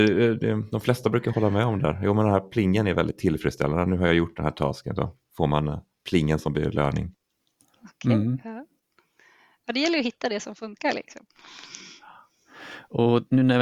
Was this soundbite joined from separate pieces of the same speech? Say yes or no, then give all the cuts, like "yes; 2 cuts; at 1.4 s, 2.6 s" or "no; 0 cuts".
no; 0 cuts